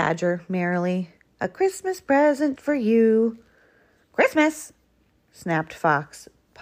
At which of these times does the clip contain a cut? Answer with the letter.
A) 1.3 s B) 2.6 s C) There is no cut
B